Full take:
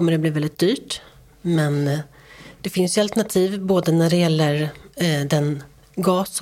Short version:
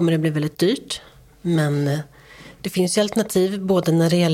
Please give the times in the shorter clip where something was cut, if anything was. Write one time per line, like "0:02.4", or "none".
none